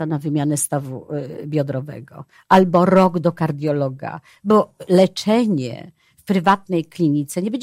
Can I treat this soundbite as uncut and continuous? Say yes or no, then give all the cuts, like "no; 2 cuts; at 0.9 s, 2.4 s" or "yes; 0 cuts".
yes; 0 cuts